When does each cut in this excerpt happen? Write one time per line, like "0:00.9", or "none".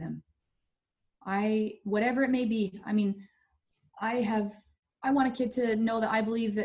none